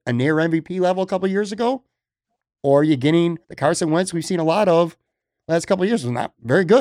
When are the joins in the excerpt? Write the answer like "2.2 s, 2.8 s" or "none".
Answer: 3.4 s